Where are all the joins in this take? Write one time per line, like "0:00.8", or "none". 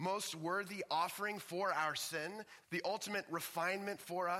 0:02.6